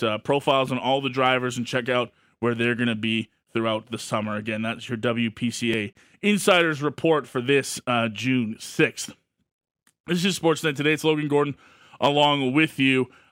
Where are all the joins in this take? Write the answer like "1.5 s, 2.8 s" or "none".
none